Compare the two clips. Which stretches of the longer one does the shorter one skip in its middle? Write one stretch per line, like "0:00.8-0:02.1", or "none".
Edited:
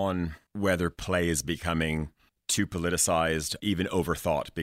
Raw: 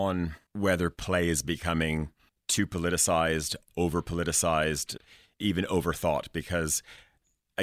0:03.6-0:05.4